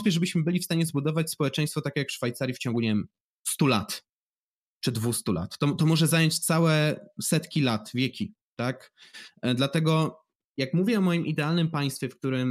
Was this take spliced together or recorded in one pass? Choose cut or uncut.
uncut